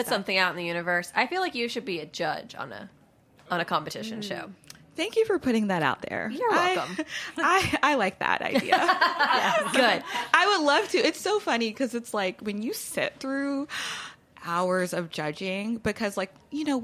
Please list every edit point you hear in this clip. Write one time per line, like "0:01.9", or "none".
none